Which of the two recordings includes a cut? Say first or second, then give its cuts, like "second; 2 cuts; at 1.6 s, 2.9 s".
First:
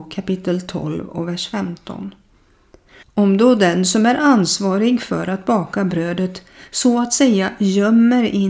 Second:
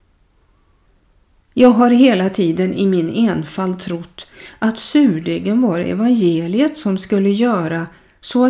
first; 1 cut; at 3.0 s